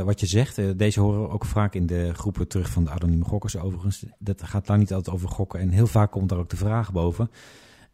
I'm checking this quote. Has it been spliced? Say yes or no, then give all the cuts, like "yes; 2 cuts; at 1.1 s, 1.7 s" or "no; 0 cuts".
no; 0 cuts